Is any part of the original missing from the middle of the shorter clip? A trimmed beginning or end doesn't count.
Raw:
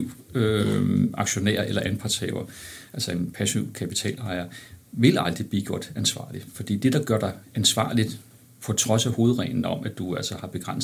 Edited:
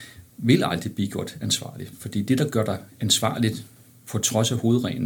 no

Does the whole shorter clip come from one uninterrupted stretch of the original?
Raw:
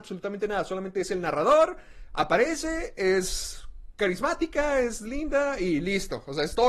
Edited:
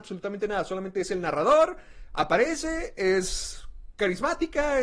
yes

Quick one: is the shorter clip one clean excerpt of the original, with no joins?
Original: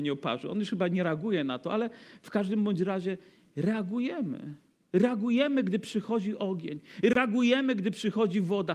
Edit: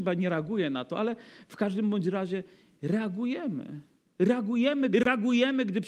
no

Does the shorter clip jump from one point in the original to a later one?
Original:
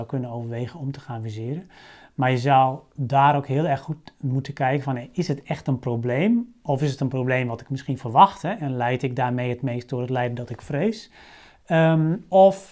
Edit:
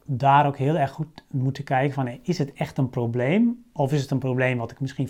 no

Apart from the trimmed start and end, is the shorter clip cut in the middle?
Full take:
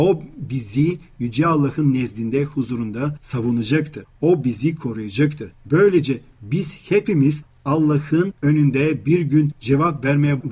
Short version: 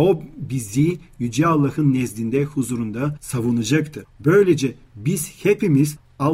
yes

